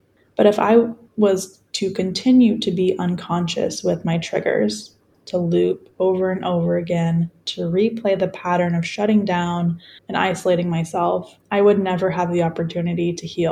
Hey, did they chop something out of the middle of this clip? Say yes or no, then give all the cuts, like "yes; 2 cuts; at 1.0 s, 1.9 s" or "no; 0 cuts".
yes; 3 cuts; at 5.1 s, 10.0 s, 11.4 s